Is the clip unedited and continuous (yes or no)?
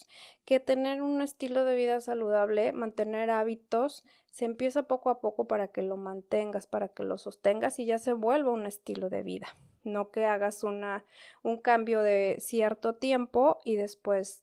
yes